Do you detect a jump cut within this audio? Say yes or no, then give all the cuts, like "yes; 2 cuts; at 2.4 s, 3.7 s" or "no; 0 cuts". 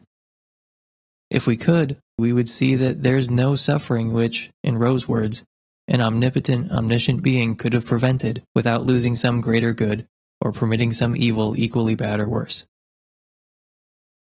yes; 2 cuts; at 2.2 s, 8.5 s